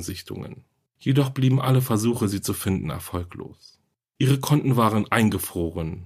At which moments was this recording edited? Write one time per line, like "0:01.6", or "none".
none